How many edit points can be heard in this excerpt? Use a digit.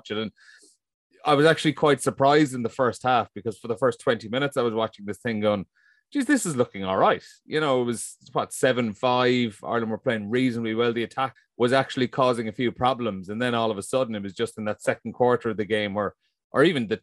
1